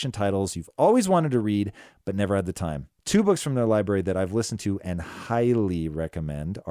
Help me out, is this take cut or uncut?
cut